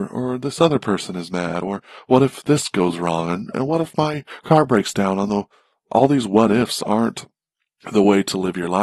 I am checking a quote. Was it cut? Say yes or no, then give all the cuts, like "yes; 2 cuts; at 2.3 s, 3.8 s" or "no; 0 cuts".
no; 0 cuts